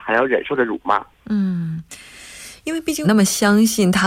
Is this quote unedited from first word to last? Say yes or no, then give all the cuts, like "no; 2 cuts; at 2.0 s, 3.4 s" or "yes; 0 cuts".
no; 2 cuts; at 1.1 s, 3.0 s